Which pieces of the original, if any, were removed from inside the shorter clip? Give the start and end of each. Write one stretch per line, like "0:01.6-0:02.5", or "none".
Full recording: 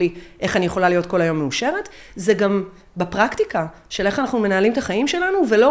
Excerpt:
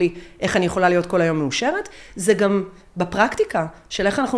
none